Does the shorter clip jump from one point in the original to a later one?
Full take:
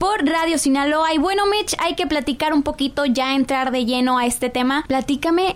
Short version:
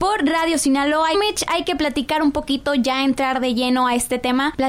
yes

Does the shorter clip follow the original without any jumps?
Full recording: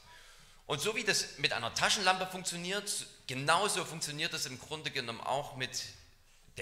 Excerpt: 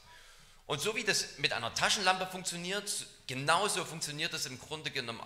yes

